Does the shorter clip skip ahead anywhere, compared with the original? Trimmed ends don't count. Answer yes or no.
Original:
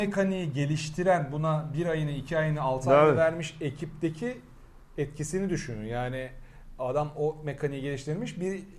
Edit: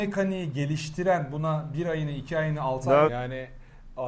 yes